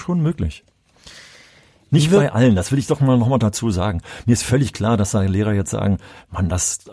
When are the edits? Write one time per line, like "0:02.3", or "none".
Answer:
none